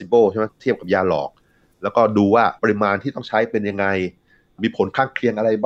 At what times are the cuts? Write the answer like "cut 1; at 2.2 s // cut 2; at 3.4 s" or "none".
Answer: cut 1; at 2.6 s